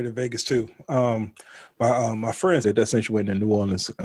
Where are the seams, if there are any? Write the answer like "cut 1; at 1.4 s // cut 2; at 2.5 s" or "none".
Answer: cut 1; at 2.6 s